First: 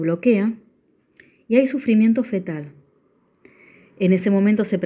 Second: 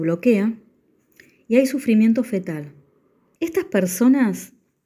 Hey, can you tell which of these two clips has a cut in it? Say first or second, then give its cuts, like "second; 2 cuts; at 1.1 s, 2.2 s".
second; 1 cut; at 3.4 s